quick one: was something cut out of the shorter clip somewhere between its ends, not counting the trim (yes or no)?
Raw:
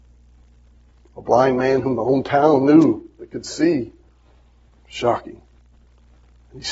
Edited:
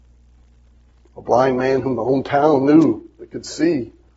no